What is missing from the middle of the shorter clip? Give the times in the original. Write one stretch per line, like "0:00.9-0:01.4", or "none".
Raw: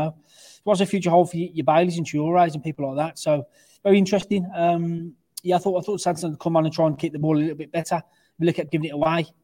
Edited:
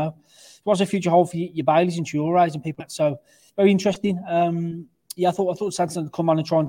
0:02.8-0:03.1